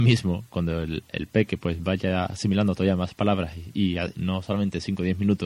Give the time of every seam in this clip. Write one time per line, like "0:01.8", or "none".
0:04.1